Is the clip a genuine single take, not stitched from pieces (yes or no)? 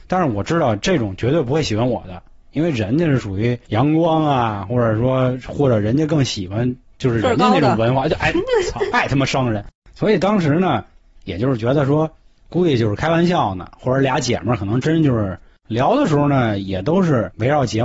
yes